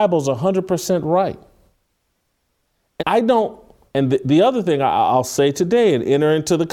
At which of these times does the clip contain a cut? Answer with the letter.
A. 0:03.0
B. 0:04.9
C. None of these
A